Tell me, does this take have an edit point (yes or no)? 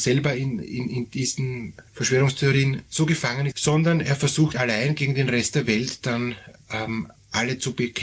yes